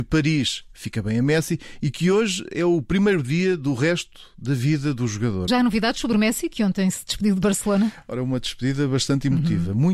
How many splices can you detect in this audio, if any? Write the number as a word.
one